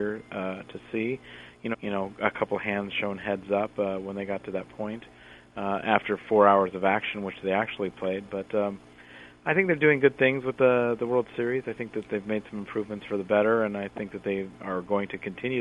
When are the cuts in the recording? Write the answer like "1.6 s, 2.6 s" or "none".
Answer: 1.7 s